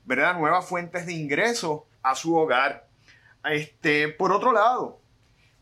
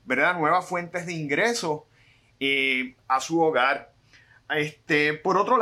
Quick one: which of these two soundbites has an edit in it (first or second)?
first